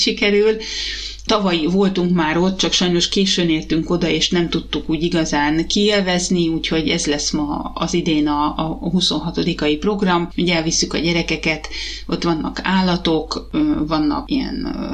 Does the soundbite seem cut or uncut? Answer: cut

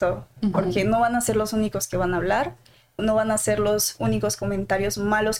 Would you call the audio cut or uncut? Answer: cut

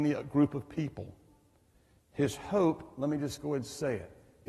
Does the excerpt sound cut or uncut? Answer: uncut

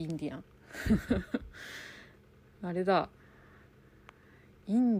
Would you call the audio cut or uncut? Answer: uncut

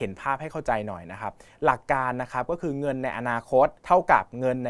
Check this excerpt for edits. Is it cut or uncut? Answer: cut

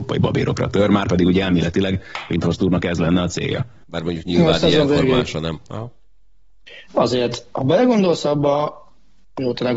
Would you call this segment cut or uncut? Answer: cut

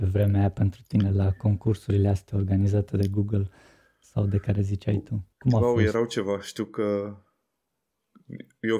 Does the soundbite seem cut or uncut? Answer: cut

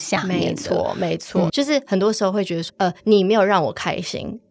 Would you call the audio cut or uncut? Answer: cut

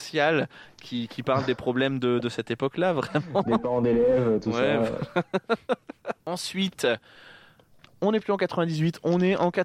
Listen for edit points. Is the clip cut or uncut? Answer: uncut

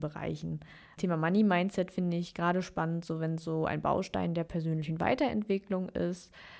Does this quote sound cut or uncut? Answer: uncut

